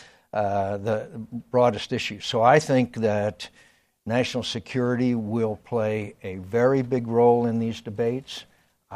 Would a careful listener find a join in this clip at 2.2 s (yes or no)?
no